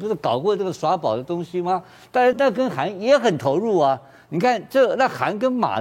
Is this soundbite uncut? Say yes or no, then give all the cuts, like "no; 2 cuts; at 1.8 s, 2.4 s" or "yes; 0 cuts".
no; 1 cut; at 2.3 s